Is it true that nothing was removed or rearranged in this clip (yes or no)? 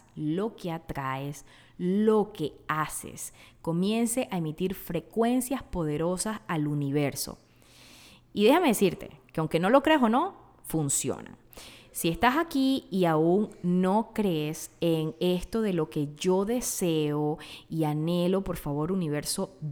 yes